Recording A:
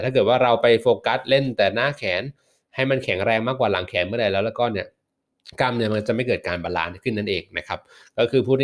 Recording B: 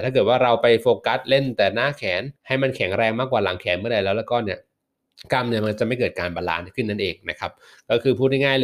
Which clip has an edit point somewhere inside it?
B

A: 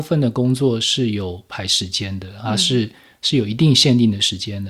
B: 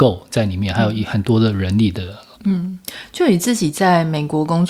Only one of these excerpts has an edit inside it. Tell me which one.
B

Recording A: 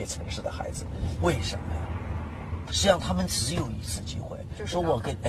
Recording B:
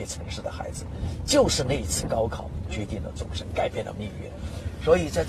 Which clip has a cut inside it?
A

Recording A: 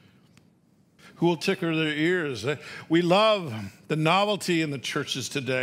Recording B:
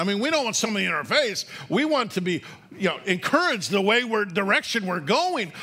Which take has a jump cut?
A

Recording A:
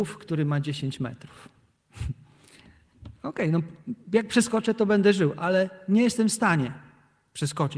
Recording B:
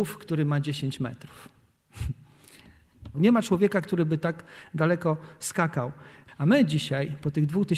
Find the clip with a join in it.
B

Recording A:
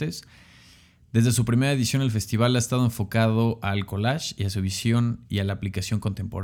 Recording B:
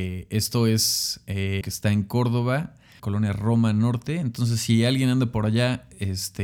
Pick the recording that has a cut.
B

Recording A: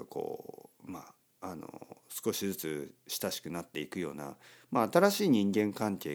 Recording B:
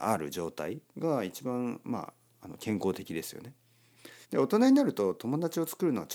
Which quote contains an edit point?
B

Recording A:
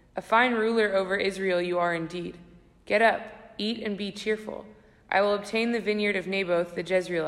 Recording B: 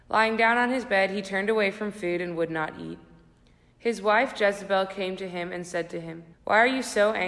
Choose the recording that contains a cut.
B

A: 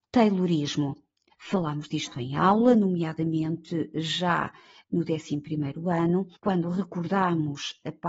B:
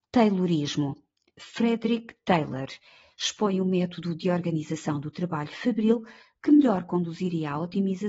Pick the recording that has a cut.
A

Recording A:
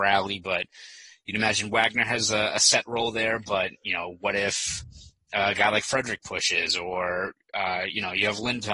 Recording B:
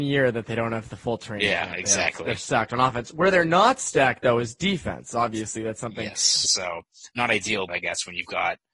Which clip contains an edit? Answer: B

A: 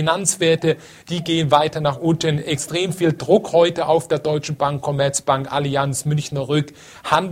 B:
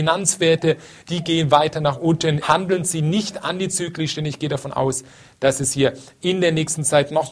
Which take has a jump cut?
B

